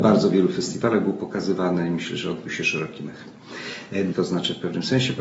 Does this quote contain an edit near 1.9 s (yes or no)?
no